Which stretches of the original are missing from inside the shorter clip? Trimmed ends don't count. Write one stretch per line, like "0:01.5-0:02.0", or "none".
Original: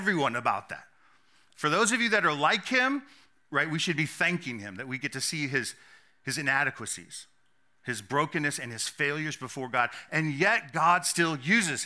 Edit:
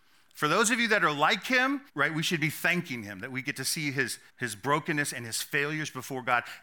0:03.1-0:03.4
0:05.9-0:07.8